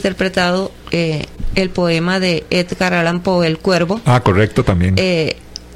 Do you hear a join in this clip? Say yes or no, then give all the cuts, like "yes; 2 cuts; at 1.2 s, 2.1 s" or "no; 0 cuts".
no; 0 cuts